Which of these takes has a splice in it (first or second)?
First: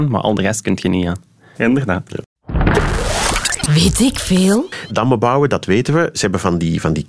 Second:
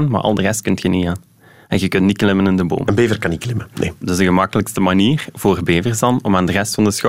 first